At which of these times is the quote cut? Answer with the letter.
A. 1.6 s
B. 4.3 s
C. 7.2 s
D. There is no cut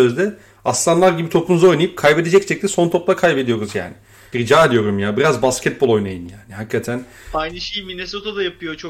B